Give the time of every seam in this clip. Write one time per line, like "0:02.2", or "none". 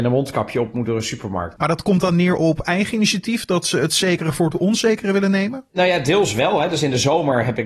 0:01.6